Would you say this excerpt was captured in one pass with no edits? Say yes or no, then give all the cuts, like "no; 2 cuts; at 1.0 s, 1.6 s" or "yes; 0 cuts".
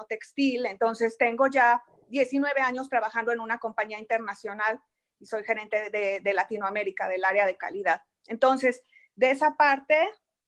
yes; 0 cuts